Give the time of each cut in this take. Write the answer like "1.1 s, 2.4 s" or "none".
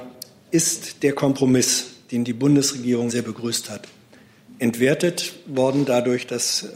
3.1 s